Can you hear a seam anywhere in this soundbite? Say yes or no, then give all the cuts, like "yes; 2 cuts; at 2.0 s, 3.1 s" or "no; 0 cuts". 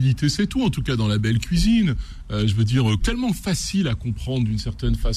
yes; 1 cut; at 3.0 s